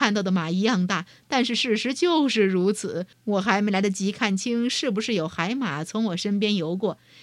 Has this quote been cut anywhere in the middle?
yes; 1 cut; at 3.1 s

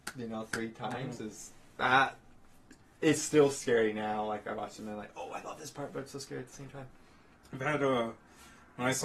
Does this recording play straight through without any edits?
yes; 0 cuts

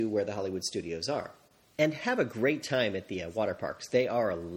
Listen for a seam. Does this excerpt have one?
yes; 1 cut; at 1.7 s

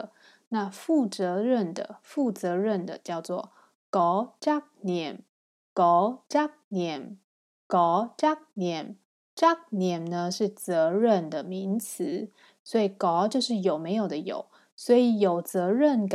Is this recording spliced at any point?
no; 0 cuts

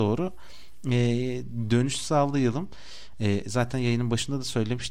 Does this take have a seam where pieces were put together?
no; 0 cuts

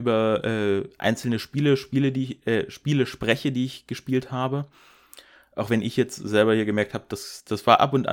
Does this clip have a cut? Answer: no; 0 cuts

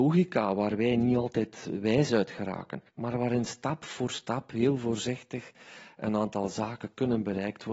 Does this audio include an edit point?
yes; 1 cut; at 2.9 s

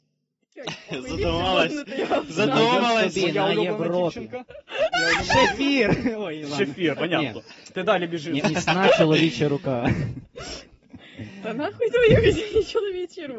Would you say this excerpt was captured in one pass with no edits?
no; 2 cuts; at 6.9 s, 8.4 s

